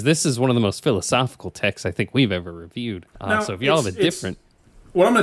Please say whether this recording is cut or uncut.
cut